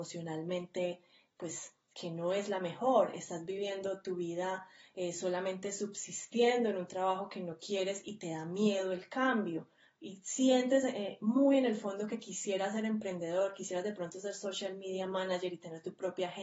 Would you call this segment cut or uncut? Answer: uncut